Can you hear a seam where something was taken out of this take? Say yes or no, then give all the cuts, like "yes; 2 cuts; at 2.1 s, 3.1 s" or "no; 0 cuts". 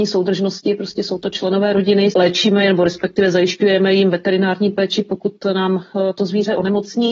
yes; 1 cut; at 2.1 s